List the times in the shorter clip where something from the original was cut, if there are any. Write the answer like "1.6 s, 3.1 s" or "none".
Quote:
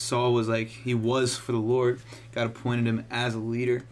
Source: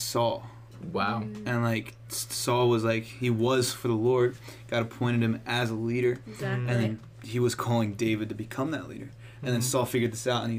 none